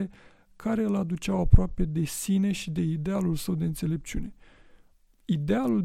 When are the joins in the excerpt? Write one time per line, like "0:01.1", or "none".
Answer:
none

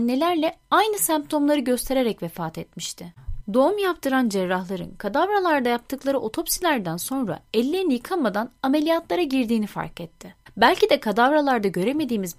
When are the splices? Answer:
0:03.4

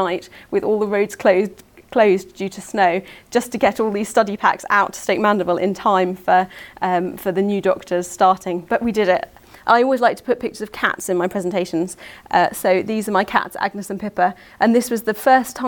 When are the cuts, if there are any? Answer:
none

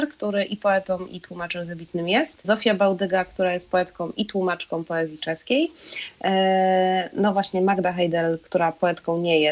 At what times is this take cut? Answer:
0:02.4

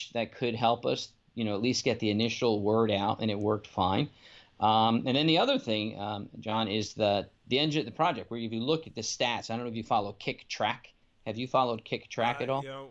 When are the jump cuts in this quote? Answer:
none

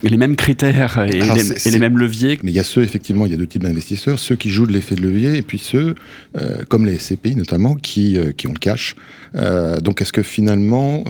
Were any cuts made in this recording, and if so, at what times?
0:02.4

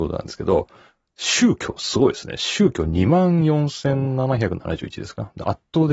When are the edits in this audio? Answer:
none

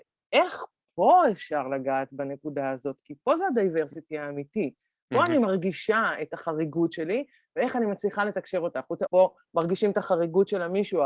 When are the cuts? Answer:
0:09.1

